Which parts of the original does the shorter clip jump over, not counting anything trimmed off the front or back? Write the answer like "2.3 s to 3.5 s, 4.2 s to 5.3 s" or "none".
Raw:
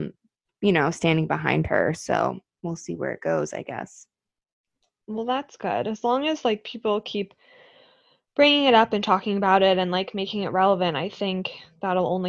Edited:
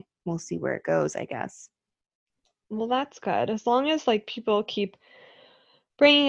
none